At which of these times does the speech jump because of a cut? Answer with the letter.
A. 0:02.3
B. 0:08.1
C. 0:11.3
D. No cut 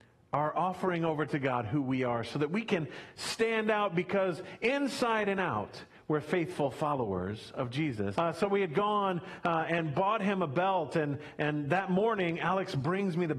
B